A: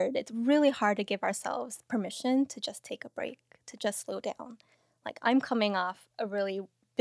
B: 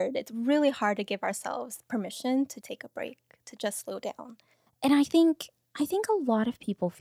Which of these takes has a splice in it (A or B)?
B